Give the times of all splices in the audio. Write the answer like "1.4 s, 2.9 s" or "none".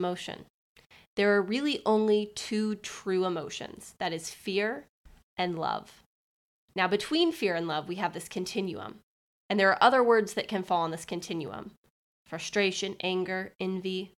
none